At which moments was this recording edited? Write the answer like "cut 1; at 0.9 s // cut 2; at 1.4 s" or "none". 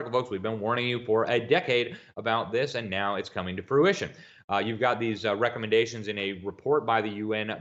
none